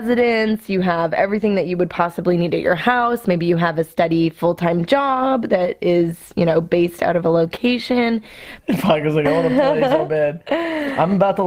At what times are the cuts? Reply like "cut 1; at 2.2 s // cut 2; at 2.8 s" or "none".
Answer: cut 1; at 8.6 s